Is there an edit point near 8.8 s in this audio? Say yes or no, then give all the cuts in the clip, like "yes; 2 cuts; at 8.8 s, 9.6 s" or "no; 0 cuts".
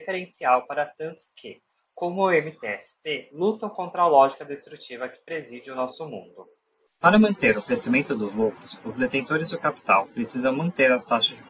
no; 1 cut; at 6.9 s